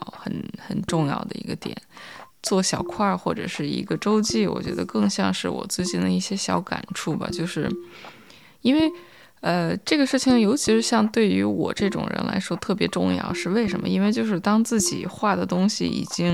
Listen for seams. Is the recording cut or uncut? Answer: cut